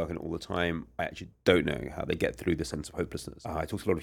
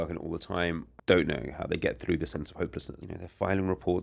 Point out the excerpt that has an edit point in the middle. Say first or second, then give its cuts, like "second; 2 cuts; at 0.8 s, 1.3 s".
second; 2 cuts; at 1.0 s, 3.0 s